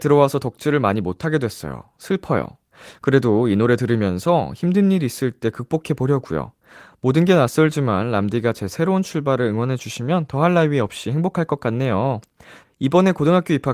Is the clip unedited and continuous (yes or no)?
no